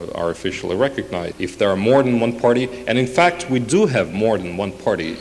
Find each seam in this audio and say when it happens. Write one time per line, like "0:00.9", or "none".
0:01.3